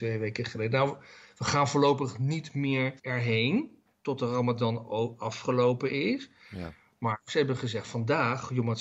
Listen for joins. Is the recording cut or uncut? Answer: cut